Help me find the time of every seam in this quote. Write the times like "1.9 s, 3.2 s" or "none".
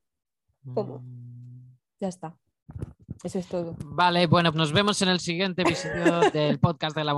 4.5 s